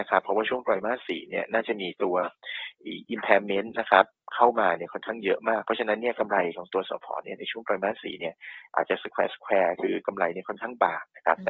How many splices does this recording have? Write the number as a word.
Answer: zero